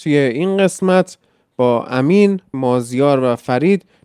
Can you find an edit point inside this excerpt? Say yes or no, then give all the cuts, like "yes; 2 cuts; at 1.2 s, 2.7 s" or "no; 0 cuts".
yes; 1 cut; at 2.5 s